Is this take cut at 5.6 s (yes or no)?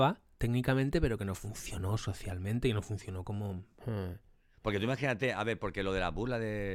no